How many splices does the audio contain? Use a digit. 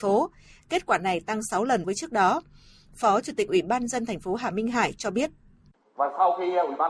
1